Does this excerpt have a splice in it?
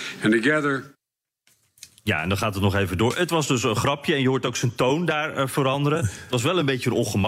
no; 0 cuts

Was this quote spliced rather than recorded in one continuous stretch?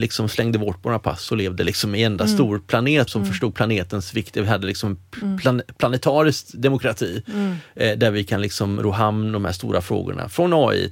yes; 1 cut; at 3.1 s

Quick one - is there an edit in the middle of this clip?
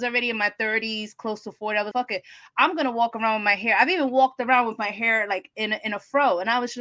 yes; 1 cut; at 1.9 s

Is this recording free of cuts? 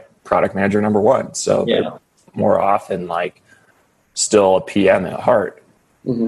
yes; 0 cuts

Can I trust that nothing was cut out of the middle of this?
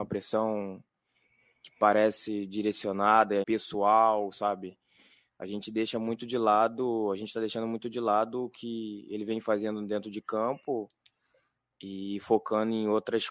no; 1 cut; at 3.4 s

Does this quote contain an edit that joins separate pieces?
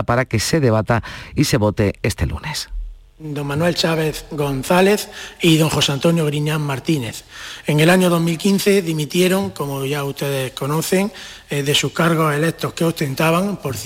no; 0 cuts

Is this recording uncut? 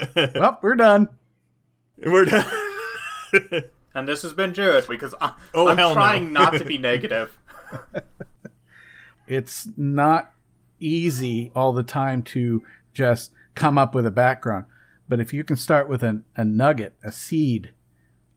no; 2 cuts; at 4.9 s, 9.1 s

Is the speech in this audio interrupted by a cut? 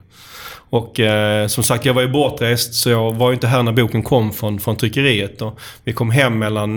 no; 0 cuts

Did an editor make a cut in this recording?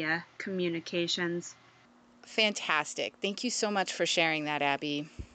no; 0 cuts

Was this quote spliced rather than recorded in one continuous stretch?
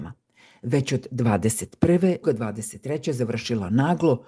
yes; 1 cut; at 2.2 s

